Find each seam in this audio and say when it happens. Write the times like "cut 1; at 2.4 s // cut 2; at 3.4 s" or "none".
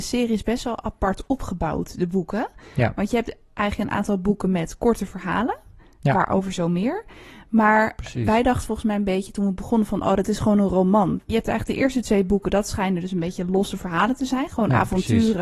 cut 1; at 11.3 s